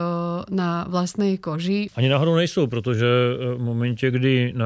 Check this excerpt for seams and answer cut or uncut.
cut